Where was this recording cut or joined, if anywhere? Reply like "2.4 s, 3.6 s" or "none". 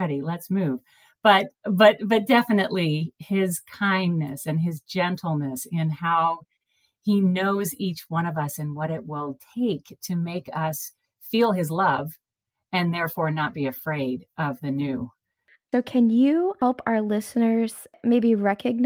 none